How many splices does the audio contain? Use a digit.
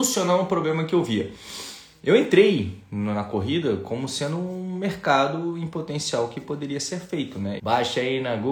1